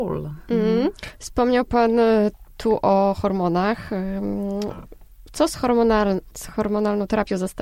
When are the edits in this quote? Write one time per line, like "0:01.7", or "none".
0:06.3